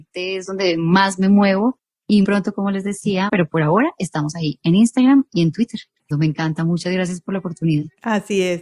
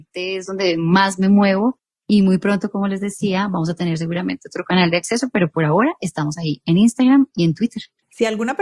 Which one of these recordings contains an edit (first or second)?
first